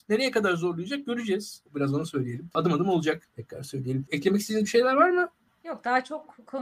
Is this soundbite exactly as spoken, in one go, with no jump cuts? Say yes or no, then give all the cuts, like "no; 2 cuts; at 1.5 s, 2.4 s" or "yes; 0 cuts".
no; 2 cuts; at 1.7 s, 3.2 s